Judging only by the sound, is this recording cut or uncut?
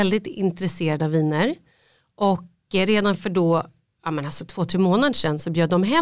uncut